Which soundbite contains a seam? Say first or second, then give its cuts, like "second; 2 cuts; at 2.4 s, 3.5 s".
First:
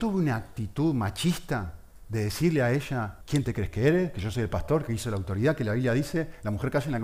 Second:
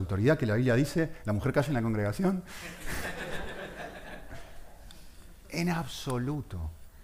first; 1 cut; at 3.2 s